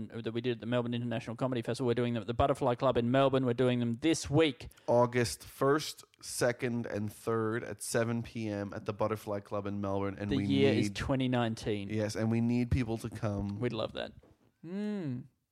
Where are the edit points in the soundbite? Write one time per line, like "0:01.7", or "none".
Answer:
0:14.5